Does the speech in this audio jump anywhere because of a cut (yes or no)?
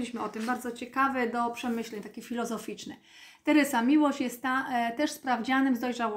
no